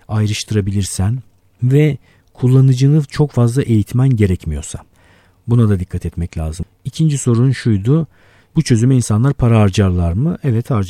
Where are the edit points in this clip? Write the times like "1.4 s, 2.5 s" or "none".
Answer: 6.6 s

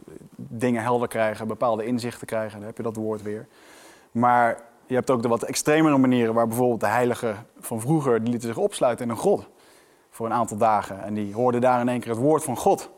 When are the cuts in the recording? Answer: none

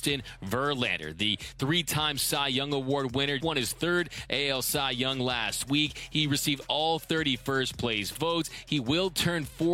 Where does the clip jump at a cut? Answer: 3.4 s

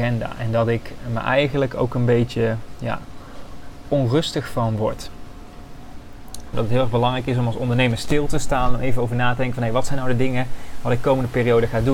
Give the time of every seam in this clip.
6.5 s

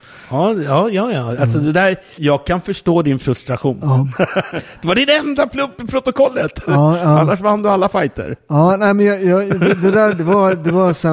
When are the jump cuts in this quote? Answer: 2.2 s

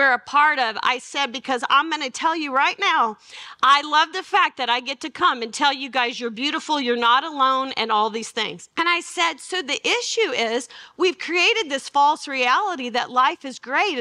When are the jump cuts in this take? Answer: 8.7 s

